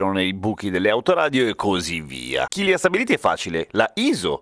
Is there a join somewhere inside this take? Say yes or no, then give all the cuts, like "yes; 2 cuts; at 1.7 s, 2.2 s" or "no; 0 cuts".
yes; 1 cut; at 2.5 s